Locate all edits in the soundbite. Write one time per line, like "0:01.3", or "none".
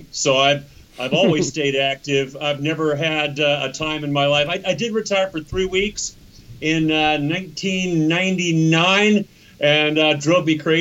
none